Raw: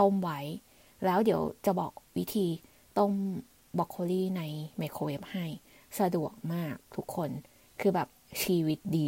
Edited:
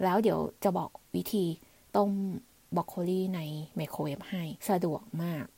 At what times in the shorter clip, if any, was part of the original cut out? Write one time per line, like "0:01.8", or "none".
0:04.6